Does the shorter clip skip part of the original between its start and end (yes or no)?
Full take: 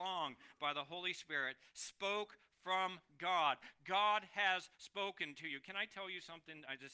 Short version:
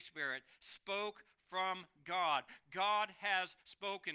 no